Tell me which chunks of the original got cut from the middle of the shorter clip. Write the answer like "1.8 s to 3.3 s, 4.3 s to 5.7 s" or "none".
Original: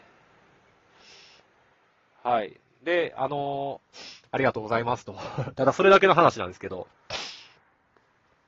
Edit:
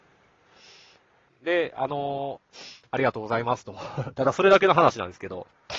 1.7 s to 2.7 s